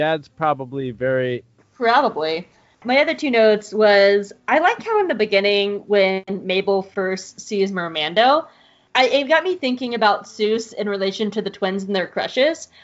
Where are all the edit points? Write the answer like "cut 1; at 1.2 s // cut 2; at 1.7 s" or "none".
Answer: cut 1; at 1.6 s